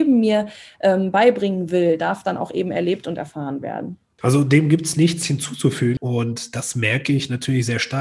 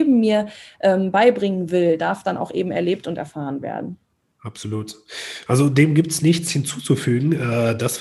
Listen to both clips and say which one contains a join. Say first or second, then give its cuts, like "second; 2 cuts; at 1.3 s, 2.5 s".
first; 2 cuts; at 4.2 s, 6.0 s